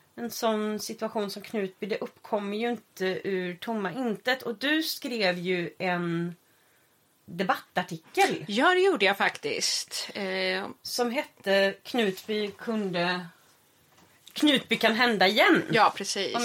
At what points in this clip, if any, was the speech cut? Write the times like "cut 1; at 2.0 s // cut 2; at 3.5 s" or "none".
none